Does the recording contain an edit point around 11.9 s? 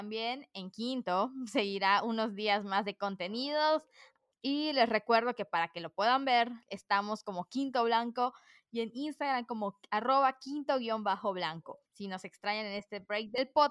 yes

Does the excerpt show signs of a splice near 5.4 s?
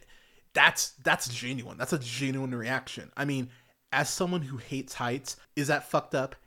yes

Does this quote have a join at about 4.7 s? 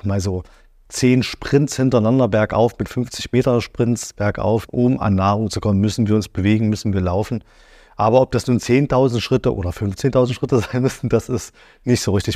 yes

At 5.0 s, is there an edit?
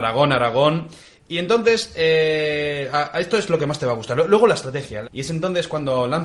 yes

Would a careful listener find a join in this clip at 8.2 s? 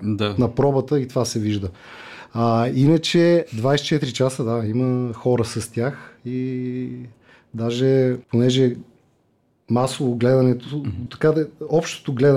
yes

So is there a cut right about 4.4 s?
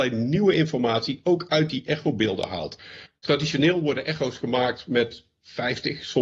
no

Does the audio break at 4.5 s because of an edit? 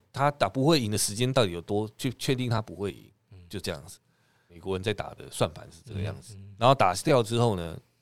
yes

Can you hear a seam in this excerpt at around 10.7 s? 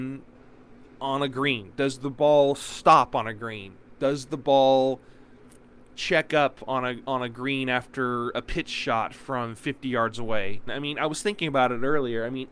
yes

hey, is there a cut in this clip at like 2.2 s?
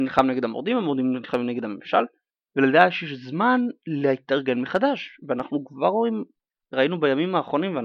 no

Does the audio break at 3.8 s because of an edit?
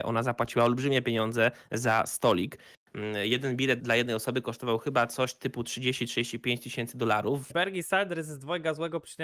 yes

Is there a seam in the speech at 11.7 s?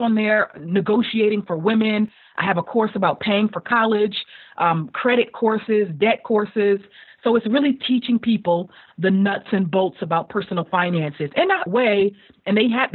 yes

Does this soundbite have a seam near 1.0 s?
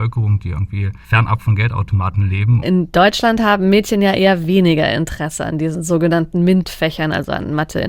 yes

